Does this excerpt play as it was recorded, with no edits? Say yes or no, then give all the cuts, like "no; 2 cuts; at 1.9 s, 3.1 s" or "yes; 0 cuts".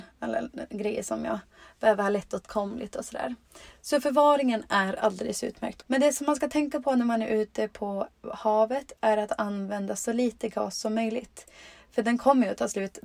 no; 1 cut; at 5.8 s